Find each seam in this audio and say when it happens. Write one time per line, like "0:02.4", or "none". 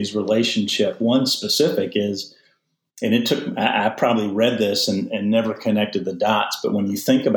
none